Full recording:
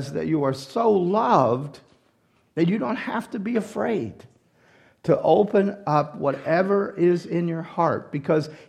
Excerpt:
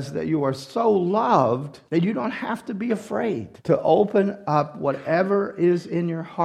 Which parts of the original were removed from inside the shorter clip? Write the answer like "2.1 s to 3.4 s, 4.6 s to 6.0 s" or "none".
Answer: 1.9 s to 2.5 s, 4.2 s to 5.0 s